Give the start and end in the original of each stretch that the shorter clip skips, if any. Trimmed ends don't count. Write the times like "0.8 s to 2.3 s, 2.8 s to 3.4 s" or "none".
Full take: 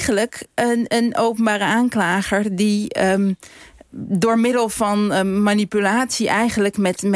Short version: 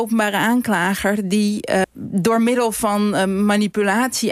3.1 s to 3.8 s